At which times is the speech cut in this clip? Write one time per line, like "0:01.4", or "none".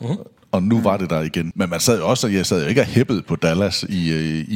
0:01.5